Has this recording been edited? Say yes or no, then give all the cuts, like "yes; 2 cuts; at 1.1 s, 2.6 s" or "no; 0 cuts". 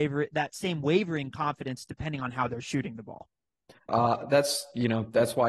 yes; 1 cut; at 3.9 s